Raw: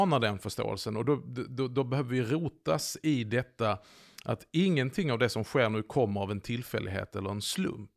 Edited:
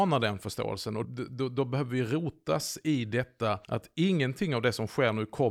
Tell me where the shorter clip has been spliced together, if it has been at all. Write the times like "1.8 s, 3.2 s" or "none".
1.0 s, 3.6 s